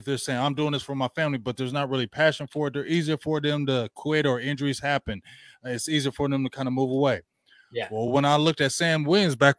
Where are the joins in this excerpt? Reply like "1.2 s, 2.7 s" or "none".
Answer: none

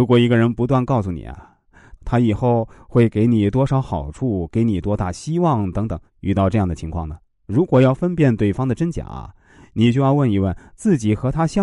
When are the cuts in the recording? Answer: 1.9 s, 6.1 s

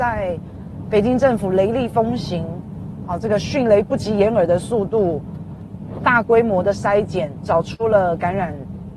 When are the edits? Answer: none

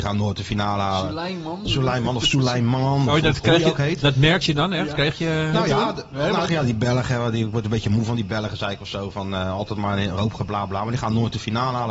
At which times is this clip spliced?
6.5 s

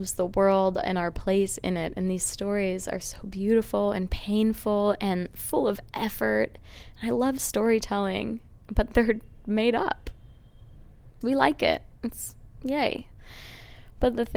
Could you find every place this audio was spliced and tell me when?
8.6 s, 11.2 s

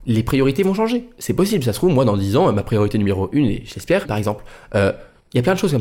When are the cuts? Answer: 4.0 s

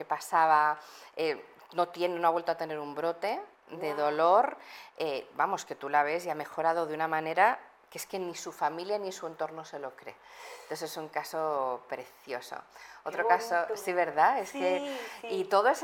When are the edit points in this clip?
none

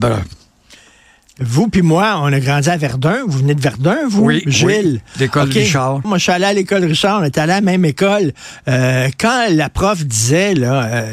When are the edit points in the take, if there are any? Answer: 6.0 s

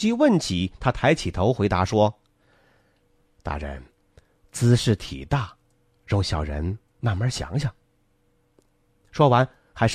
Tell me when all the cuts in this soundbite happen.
none

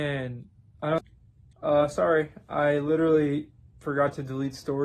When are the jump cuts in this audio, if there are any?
1.5 s

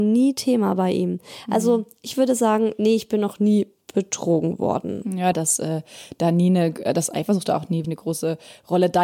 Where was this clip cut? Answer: 5.3 s, 7.8 s

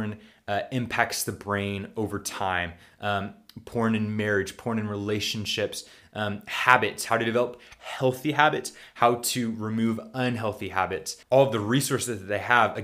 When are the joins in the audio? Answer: 11.2 s

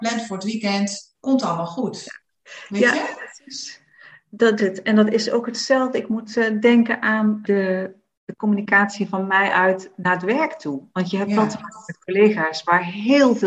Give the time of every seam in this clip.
4.6 s, 7.4 s

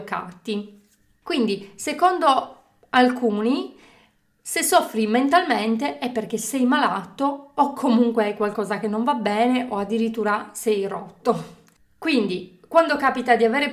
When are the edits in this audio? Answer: none

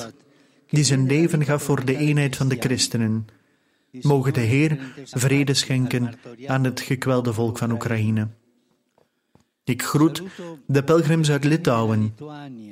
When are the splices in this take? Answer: 3.9 s, 5.1 s

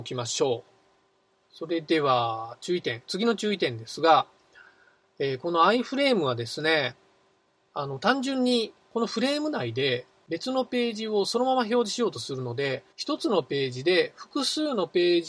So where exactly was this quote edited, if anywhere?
1.4 s, 12.9 s

